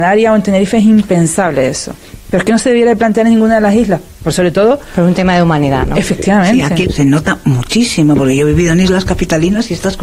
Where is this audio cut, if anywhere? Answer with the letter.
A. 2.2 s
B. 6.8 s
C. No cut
B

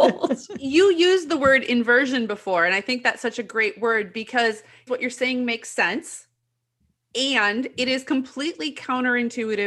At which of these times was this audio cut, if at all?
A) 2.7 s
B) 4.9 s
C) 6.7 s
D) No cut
B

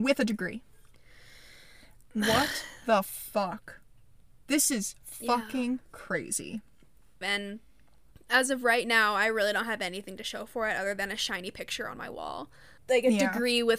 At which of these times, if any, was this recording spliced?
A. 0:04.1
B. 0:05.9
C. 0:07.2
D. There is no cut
C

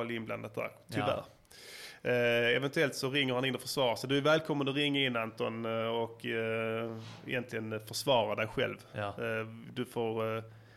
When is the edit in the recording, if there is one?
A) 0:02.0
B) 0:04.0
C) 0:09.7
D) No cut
D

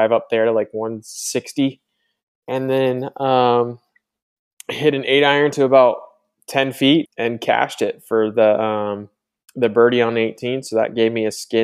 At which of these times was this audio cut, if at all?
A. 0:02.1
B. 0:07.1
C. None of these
B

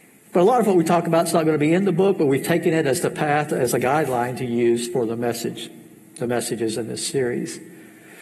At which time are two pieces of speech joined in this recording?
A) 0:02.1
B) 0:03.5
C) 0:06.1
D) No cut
B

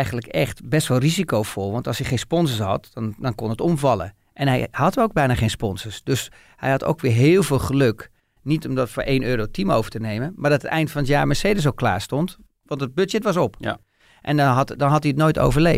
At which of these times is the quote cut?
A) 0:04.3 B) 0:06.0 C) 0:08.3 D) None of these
D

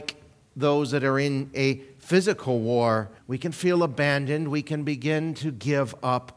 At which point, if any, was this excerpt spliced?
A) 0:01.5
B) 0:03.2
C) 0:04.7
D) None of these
B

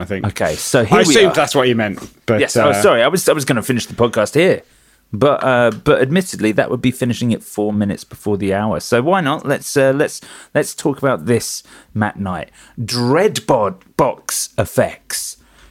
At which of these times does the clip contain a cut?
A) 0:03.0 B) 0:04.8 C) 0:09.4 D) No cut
D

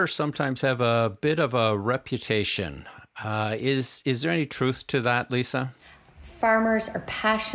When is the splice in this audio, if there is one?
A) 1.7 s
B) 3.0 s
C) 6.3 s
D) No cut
D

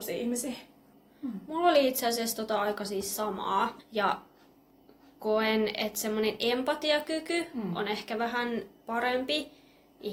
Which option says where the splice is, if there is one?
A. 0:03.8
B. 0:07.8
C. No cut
A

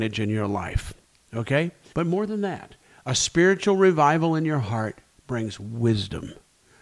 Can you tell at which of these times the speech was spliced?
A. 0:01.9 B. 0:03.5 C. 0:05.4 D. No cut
A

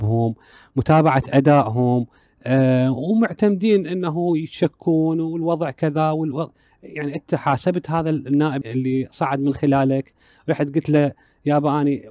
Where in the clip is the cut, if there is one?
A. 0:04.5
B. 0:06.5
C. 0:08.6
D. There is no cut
C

